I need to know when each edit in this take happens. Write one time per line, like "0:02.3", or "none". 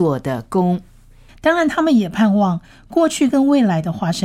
0:01.3